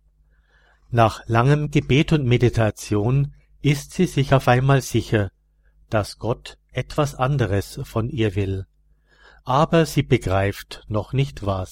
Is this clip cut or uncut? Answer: uncut